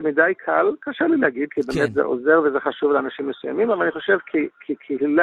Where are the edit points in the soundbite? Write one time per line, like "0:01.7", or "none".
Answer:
none